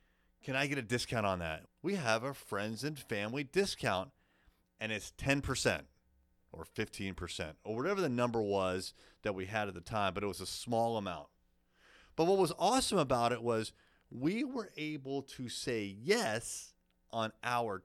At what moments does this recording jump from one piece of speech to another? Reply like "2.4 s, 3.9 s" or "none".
1.7 s